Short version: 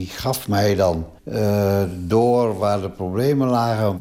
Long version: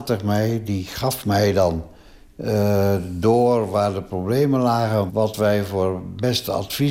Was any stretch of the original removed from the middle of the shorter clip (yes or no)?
yes